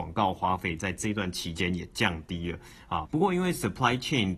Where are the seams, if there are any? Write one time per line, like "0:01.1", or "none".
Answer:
0:03.1